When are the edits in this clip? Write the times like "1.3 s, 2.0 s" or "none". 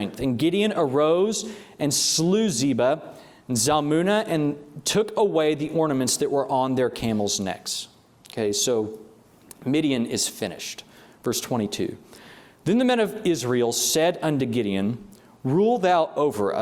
none